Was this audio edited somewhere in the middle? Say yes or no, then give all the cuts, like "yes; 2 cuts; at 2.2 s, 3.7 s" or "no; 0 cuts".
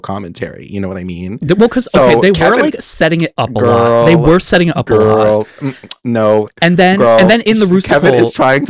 no; 0 cuts